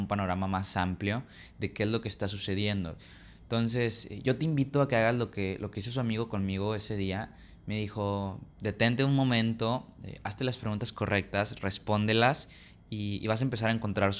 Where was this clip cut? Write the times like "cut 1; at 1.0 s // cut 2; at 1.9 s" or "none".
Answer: none